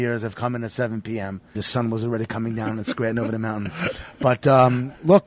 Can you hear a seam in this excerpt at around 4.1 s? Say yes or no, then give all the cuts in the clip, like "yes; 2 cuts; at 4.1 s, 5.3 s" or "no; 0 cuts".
no; 1 cut; at 1.5 s